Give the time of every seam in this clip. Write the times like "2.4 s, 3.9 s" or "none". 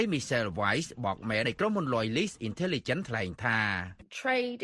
1.4 s